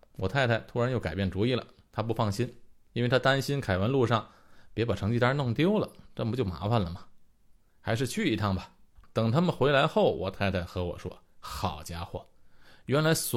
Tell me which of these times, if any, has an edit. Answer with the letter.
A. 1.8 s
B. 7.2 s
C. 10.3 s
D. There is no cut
D